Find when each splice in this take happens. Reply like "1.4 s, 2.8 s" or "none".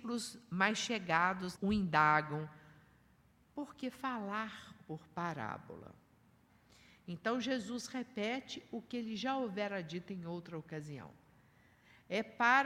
1.6 s